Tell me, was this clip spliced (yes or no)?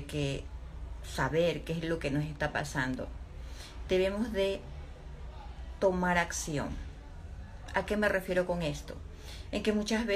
no